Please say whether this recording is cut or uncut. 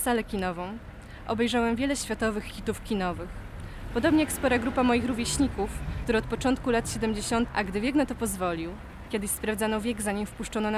cut